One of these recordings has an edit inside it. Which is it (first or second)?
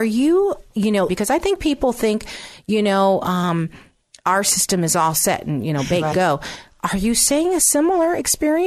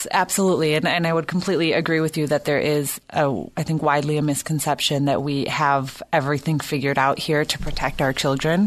first